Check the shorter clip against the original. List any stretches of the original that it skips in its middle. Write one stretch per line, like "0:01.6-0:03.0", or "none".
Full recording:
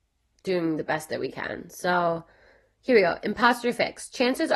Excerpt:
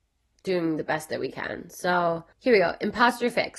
0:02.3-0:02.7